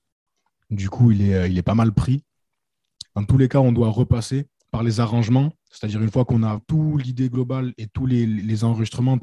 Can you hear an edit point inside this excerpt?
yes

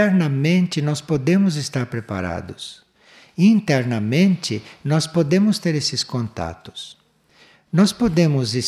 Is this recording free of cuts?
yes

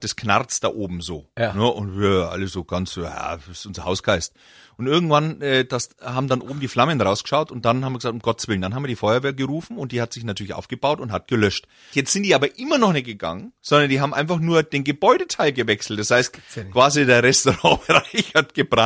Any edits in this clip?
yes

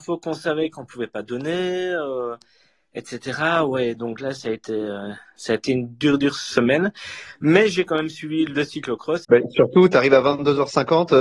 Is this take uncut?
no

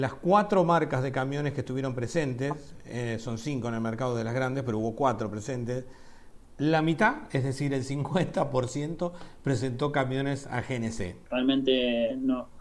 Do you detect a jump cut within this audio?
yes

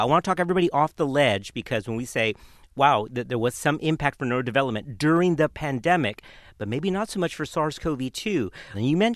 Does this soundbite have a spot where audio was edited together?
no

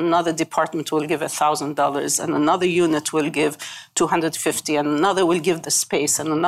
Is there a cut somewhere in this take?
no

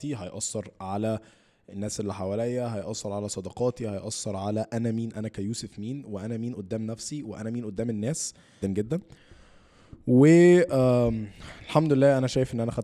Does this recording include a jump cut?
yes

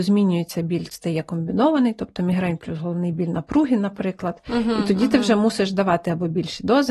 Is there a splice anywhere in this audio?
no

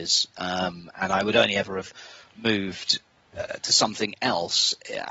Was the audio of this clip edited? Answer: no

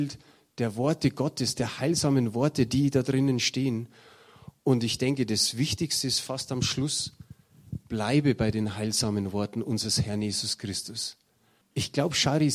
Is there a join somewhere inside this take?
yes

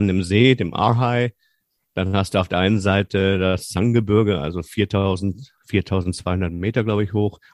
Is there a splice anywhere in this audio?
no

